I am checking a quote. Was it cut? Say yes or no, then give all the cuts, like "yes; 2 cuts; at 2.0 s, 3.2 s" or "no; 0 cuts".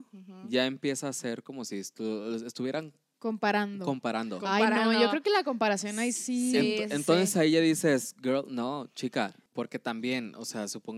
yes; 1 cut; at 9.5 s